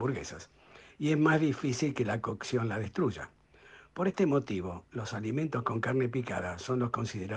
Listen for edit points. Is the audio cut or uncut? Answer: uncut